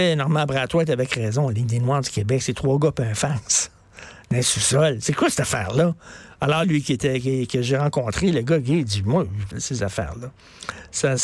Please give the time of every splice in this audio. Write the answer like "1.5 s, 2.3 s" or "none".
6.6 s, 9.5 s